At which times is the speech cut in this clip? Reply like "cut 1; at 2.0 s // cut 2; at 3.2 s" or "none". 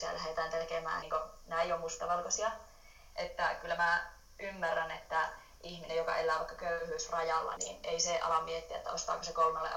cut 1; at 1.0 s // cut 2; at 3.1 s // cut 3; at 7.6 s